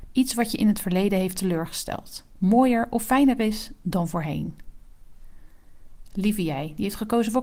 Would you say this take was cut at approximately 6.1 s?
no; 1 cut; at 2.4 s

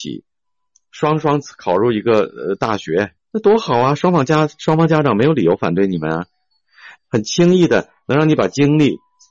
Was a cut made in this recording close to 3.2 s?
yes; 2 cuts; at 3.2 s, 7.0 s

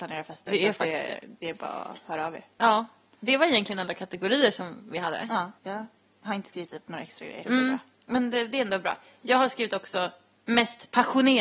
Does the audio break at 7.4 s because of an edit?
yes; 2 cuts; at 5.6 s, 7.4 s

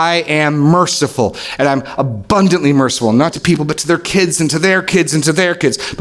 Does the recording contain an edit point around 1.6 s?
no; 1 cut; at 3.3 s

